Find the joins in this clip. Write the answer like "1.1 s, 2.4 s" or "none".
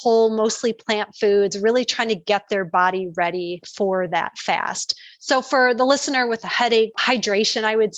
none

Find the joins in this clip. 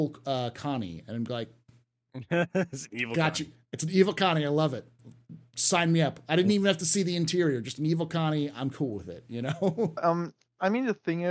10.0 s

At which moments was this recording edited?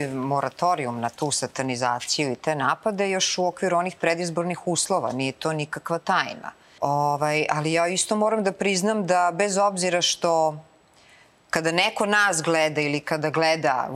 6.8 s

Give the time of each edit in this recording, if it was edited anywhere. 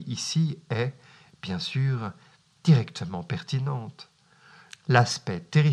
4.7 s

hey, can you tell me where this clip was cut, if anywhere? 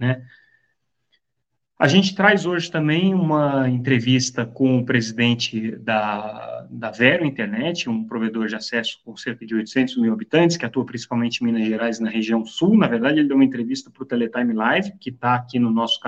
none

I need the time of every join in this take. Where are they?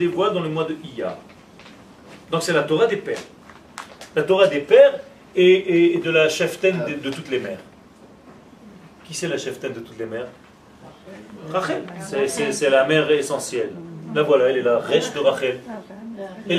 none

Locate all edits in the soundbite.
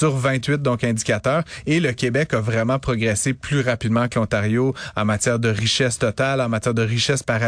none

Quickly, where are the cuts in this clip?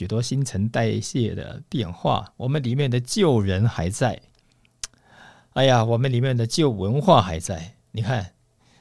none

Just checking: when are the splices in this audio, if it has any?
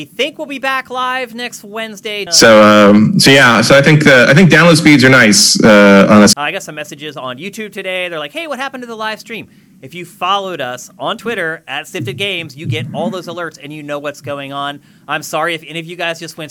2.3 s, 6.3 s

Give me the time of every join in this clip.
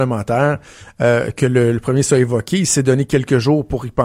none

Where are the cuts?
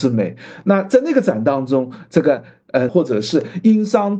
2.9 s

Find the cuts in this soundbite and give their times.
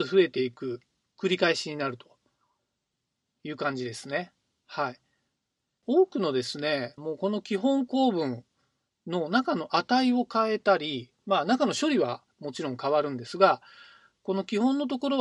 7.0 s

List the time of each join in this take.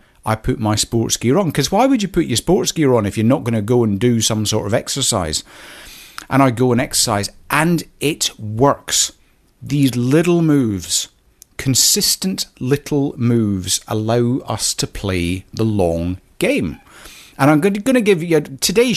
none

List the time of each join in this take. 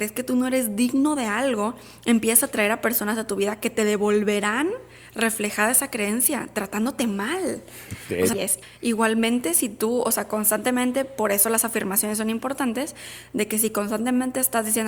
8.3 s

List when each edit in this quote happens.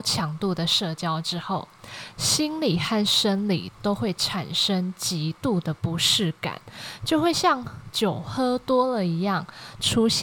none

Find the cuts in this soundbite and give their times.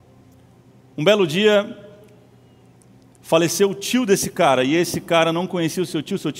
none

